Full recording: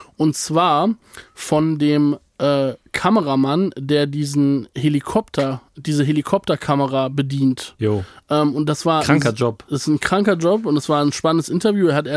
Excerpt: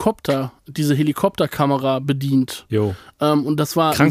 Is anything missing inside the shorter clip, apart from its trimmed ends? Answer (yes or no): no